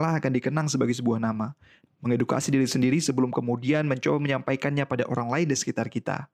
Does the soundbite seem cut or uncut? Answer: cut